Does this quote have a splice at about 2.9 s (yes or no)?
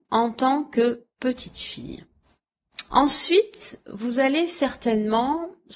yes